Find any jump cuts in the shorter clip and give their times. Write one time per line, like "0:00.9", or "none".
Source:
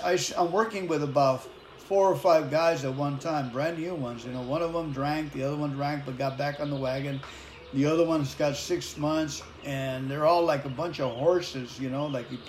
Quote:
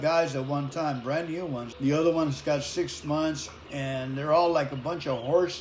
0:01.7